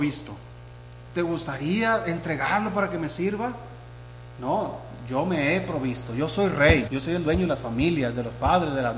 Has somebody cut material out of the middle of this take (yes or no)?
yes